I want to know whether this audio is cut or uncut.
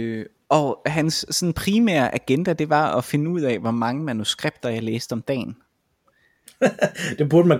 uncut